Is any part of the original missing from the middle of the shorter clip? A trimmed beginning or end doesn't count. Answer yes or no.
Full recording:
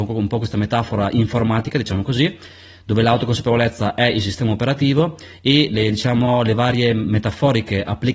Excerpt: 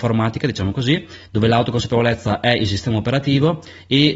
yes